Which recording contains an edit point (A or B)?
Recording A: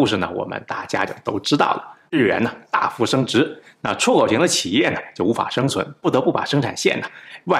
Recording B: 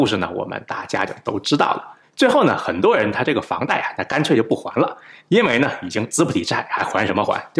B